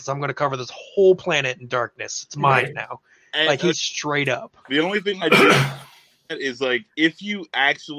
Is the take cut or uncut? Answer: cut